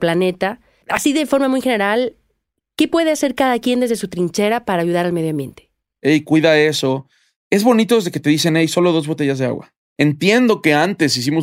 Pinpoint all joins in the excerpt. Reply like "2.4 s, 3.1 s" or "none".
6.0 s, 9.9 s